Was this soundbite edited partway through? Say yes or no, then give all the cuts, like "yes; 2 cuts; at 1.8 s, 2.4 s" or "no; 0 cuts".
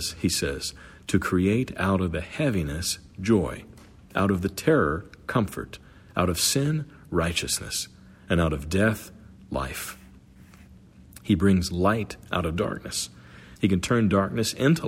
yes; 1 cut; at 13.6 s